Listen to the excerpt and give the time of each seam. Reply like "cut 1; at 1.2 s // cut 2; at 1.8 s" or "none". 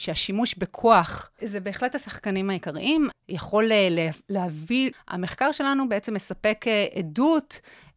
cut 1; at 1.4 s // cut 2; at 3.1 s // cut 3; at 4.9 s